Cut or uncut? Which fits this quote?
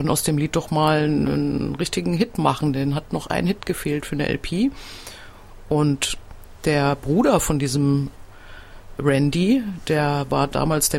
uncut